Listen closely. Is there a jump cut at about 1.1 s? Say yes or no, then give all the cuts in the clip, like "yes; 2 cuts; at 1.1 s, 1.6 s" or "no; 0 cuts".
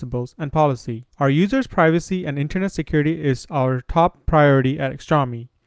yes; 1 cut; at 1.1 s